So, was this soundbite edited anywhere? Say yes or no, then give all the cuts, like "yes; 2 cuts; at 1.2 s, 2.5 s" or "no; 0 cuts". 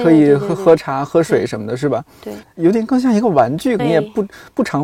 yes; 2 cuts; at 2.4 s, 3.8 s